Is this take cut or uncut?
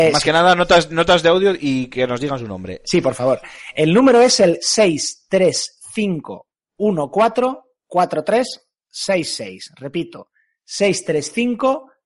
uncut